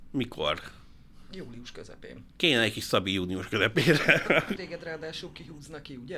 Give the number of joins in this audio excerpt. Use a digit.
1